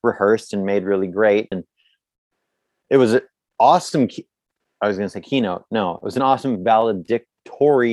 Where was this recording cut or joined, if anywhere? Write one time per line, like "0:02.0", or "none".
0:01.5